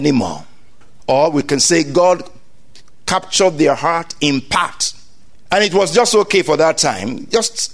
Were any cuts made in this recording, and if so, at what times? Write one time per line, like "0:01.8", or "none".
0:01.0